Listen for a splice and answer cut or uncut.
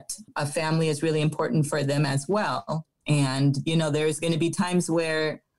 cut